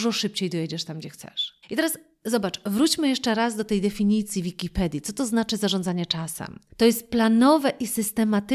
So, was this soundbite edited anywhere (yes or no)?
yes